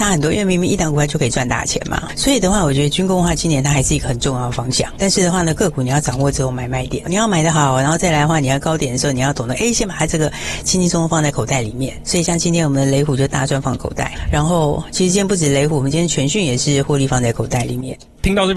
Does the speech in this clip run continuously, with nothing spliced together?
yes; 0 cuts

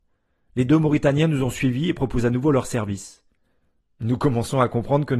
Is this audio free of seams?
no; 1 cut; at 3.8 s

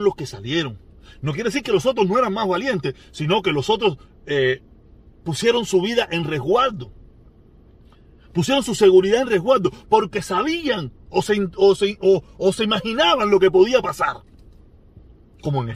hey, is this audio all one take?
yes; 0 cuts

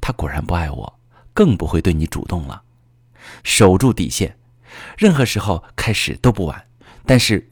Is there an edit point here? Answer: yes; 1 cut; at 3.4 s

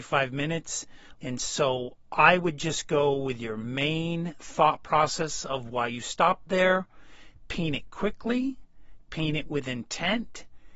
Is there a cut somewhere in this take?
yes; 1 cut; at 1.2 s

